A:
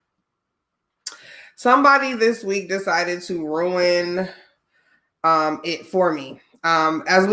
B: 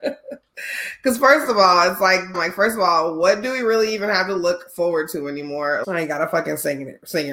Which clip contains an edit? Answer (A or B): B